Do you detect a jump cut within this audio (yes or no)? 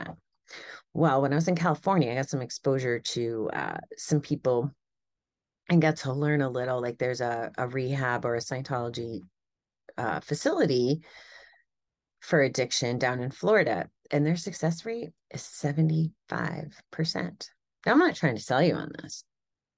no